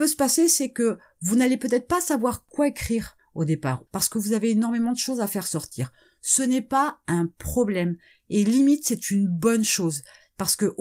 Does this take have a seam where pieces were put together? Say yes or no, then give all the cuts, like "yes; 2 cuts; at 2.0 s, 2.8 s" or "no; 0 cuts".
yes; 1 cut; at 3.9 s